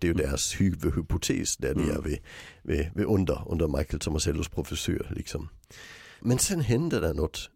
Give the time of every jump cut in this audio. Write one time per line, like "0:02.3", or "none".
0:06.2